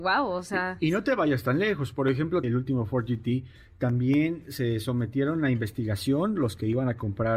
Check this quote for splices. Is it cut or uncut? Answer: cut